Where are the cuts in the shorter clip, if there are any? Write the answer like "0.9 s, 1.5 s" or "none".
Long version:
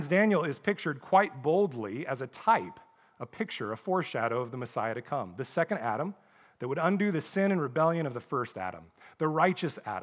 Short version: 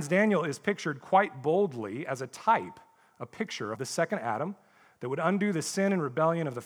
3.7 s